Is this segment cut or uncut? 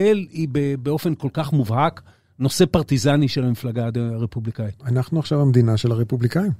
uncut